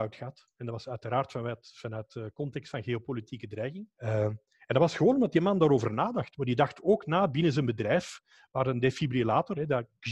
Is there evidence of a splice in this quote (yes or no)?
yes